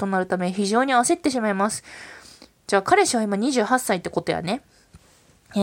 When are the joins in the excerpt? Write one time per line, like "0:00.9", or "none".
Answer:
none